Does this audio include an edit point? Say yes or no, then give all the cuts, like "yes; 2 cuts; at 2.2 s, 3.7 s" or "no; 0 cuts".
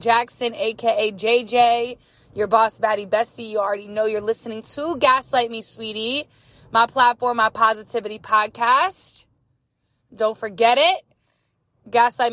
no; 0 cuts